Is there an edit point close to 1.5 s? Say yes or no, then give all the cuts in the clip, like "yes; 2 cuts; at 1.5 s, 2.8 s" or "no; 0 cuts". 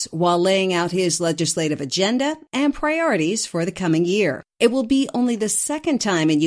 no; 1 cut; at 4.5 s